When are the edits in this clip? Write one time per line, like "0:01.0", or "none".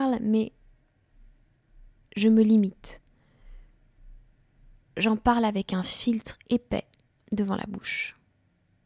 none